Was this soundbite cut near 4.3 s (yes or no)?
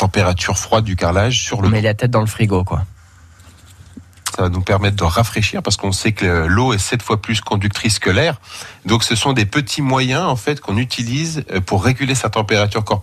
yes